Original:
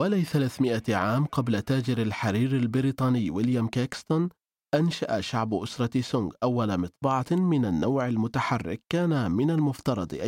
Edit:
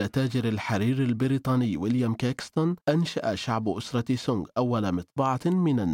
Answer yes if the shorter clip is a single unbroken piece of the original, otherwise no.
no